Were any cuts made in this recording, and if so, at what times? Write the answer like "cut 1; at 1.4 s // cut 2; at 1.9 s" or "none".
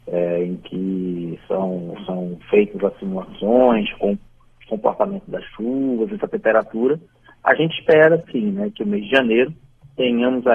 none